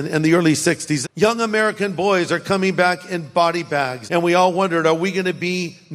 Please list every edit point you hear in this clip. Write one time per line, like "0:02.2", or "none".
0:01.0
0:04.1